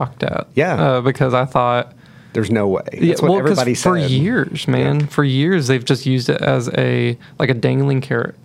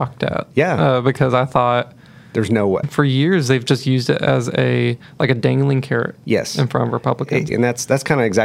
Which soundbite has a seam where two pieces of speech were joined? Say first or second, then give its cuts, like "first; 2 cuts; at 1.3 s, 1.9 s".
second; 2 cuts; at 2.8 s, 7.5 s